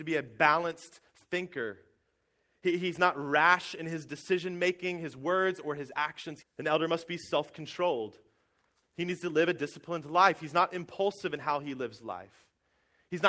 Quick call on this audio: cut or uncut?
cut